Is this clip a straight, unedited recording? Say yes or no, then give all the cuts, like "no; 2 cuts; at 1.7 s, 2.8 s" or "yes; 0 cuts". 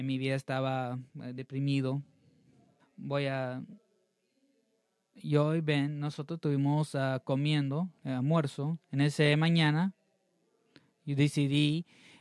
no; 2 cuts; at 2.8 s, 8.0 s